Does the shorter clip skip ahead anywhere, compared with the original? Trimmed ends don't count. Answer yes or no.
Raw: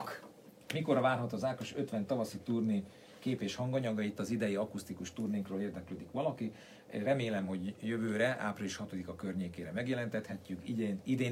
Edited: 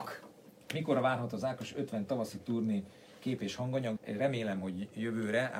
yes